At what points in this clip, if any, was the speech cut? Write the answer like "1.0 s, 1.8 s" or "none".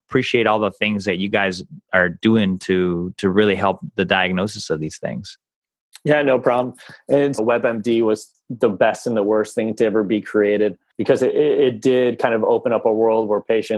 7.4 s